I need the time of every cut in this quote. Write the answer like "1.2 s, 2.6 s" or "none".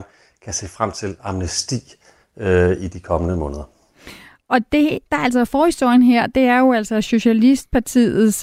none